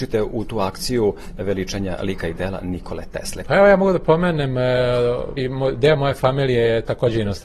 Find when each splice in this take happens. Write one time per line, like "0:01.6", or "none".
0:03.4
0:05.4